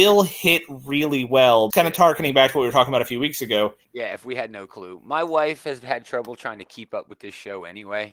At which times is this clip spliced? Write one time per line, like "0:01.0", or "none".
0:01.7
0:03.8